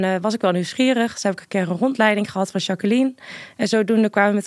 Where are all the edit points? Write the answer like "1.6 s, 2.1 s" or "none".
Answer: none